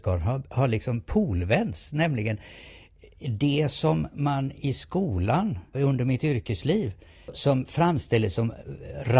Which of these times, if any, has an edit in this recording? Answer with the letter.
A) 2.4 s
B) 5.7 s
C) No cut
B